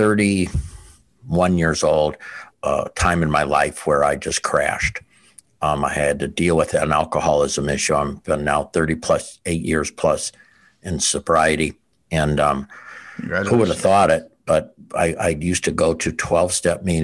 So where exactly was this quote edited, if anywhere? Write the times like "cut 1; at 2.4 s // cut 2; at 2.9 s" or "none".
cut 1; at 2.5 s